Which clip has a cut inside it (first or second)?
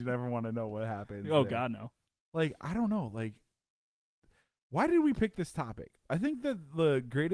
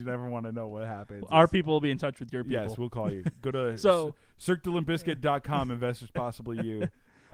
second